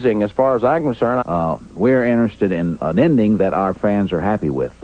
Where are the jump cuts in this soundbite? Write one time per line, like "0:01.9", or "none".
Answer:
0:01.2
0:02.8